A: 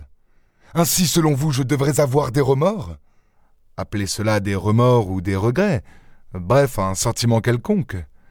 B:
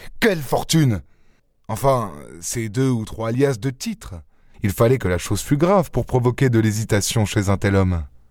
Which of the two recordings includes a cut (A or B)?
B